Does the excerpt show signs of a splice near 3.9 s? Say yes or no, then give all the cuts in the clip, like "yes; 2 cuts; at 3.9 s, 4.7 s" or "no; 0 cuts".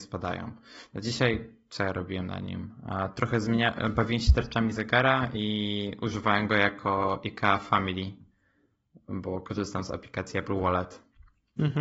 no; 0 cuts